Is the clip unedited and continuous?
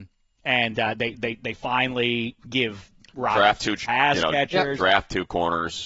yes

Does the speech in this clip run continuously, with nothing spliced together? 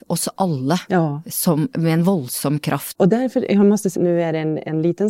no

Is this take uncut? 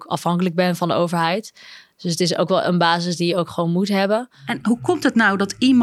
yes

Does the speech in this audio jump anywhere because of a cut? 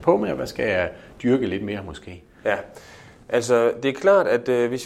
no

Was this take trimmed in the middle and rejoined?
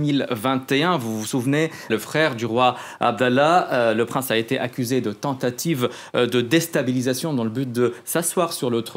yes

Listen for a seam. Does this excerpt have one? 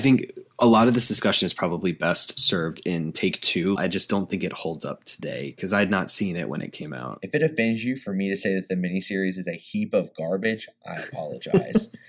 yes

